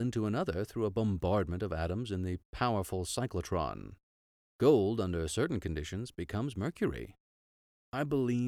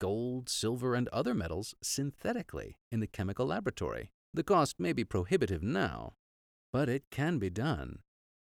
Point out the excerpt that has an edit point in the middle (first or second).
second